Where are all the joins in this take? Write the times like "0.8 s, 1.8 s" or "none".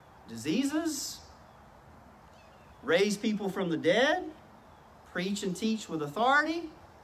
none